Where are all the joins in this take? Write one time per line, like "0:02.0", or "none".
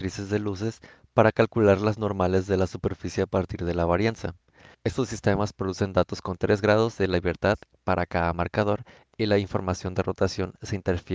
0:04.7